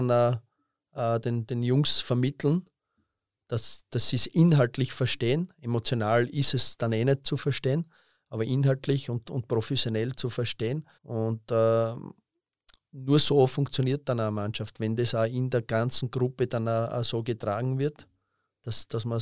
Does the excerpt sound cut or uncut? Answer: cut